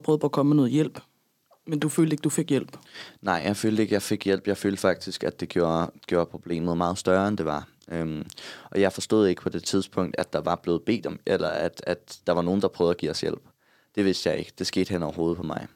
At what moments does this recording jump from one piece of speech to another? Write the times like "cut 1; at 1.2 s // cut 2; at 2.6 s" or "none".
none